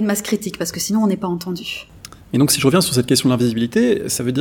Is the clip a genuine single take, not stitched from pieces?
yes; 0 cuts

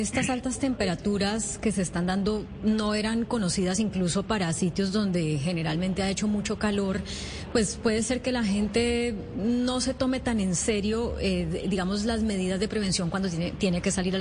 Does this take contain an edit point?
no; 0 cuts

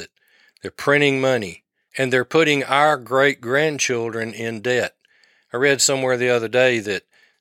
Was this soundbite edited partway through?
yes; 1 cut; at 1.9 s

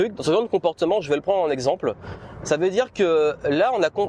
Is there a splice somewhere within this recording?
yes; 1 cut; at 2.4 s

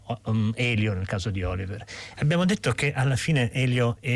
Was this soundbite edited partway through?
yes; 1 cut; at 2.1 s

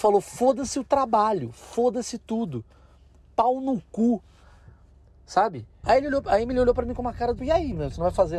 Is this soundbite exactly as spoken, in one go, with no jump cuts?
no; 2 cuts; at 5.8 s, 7.4 s

